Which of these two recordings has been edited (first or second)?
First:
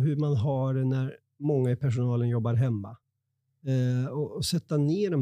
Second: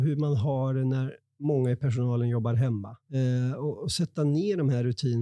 second